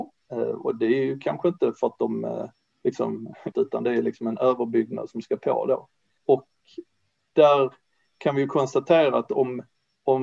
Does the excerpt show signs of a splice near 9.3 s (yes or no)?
no